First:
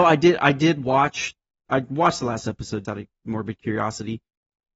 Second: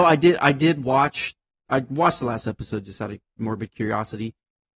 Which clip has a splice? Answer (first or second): first